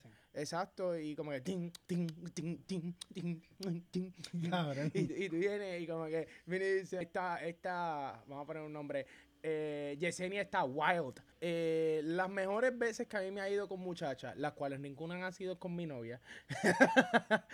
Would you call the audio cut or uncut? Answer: cut